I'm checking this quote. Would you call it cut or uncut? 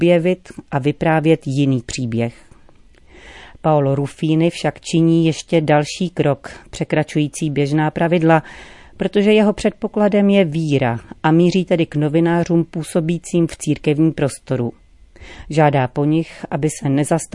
uncut